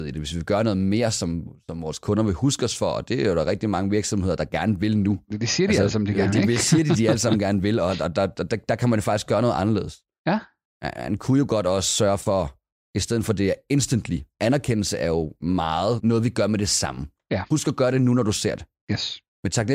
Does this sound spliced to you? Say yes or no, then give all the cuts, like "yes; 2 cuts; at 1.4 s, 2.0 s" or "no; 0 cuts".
yes; 1 cut; at 16.0 s